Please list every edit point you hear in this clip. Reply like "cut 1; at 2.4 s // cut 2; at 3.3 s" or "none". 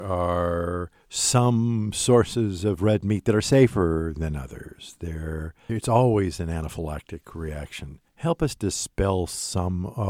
cut 1; at 5.7 s // cut 2; at 8.1 s

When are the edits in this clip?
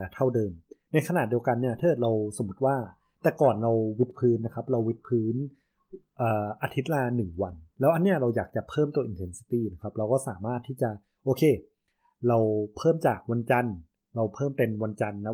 cut 1; at 7.7 s

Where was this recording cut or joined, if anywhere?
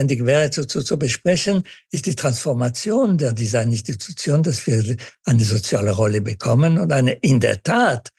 none

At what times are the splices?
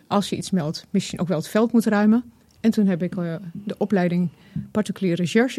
none

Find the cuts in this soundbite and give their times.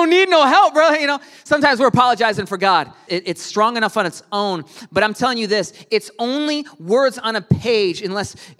cut 1; at 3.1 s

